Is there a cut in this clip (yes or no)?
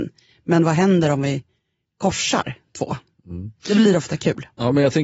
no